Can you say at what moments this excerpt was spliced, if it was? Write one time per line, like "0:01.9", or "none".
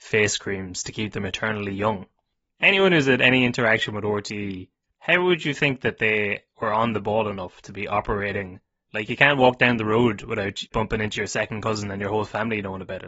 0:08.9